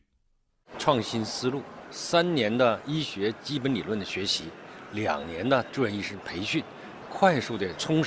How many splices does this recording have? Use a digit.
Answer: 2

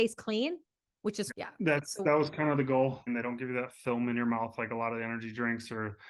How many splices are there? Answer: 2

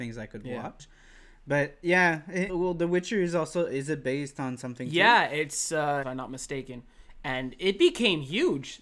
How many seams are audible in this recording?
2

